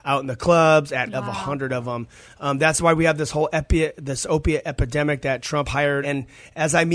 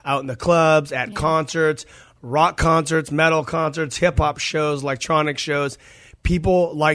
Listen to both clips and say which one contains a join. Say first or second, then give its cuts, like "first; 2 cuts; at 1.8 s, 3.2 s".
first; 2 cuts; at 1.1 s, 6.0 s